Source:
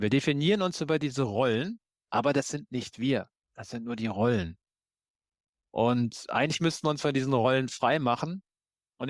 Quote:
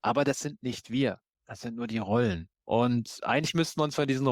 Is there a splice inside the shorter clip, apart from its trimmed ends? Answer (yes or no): yes